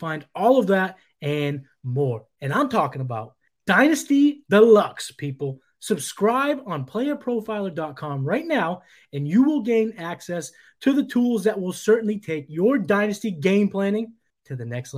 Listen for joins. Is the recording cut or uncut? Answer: uncut